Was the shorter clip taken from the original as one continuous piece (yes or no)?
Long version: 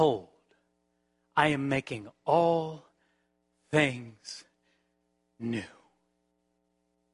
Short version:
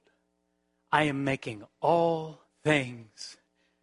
no